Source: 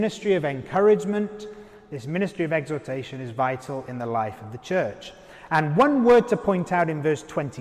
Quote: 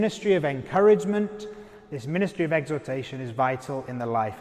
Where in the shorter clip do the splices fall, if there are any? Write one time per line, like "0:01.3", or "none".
none